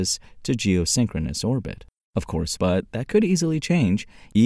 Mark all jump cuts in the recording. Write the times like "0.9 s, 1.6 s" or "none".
2.6 s